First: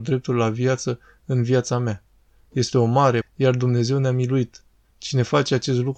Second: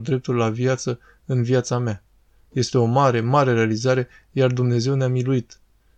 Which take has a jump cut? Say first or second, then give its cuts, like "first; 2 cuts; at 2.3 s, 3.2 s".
first; 2 cuts; at 3.2 s, 4.9 s